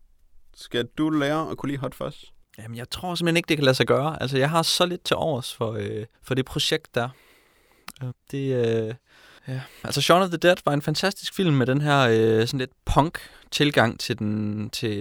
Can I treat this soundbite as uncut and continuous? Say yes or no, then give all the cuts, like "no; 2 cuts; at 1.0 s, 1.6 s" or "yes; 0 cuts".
no; 2 cuts; at 6.1 s, 8.1 s